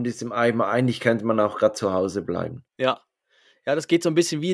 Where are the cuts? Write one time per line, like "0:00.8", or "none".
0:02.7